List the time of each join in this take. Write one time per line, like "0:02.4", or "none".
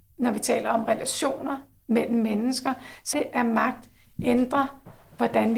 0:03.1